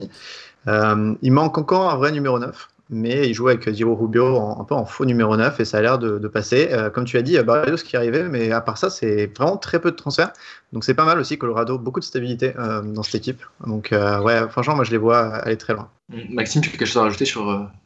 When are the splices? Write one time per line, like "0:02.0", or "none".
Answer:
0:16.0